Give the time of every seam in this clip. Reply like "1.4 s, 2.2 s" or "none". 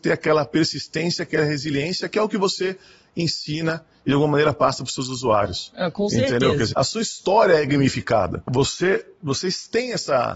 6.7 s, 8.5 s